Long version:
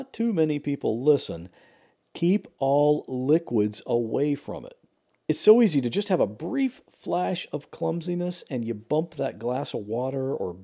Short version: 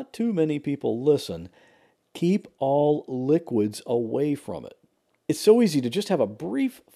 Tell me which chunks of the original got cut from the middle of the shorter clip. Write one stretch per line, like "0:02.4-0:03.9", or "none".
none